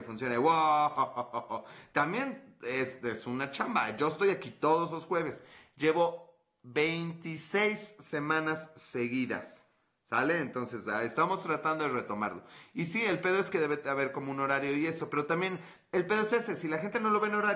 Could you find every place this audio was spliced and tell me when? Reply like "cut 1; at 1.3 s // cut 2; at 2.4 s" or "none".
none